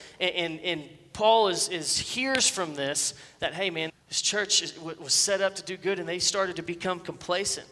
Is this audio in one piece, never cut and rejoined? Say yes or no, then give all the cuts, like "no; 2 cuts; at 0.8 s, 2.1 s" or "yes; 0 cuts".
no; 1 cut; at 3.9 s